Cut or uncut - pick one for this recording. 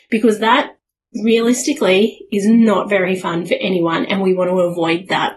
uncut